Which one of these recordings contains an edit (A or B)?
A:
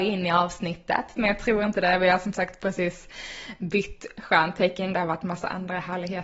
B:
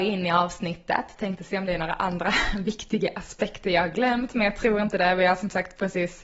A